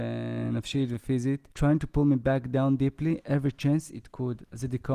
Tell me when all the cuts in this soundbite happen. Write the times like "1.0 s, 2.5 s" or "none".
1.5 s